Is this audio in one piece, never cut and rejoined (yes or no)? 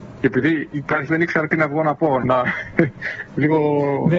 no